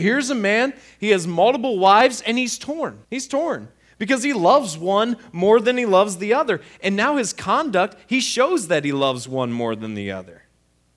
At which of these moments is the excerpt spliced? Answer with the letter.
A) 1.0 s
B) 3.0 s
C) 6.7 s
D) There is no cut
B